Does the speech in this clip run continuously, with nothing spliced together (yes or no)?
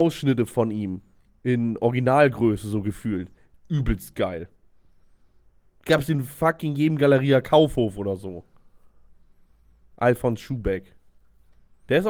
yes